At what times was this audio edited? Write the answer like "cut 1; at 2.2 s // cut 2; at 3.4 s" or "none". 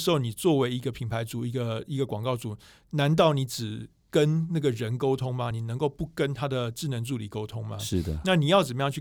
none